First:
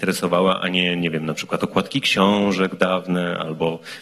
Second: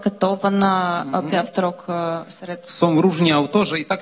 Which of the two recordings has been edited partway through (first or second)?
second